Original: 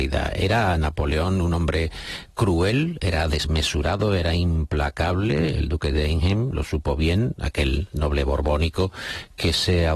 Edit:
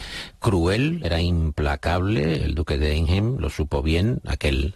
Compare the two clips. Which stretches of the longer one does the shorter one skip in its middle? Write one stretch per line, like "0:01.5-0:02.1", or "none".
0:03.0-0:04.2